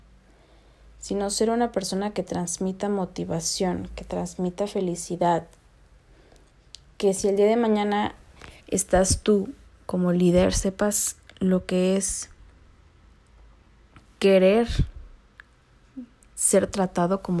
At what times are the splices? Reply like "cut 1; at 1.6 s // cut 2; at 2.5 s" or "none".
cut 1; at 8.6 s